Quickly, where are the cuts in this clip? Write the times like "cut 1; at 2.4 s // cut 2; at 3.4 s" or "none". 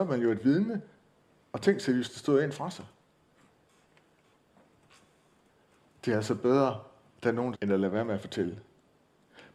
cut 1; at 7.5 s